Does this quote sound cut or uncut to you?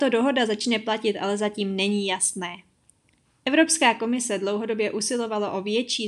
uncut